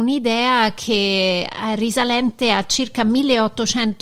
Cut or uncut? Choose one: uncut